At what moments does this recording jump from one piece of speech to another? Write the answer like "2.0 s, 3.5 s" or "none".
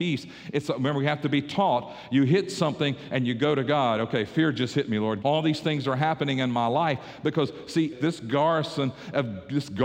5.2 s, 7.9 s